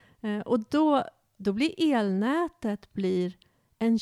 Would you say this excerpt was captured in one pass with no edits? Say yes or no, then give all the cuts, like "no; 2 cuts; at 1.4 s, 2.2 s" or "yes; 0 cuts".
no; 1 cut; at 1.4 s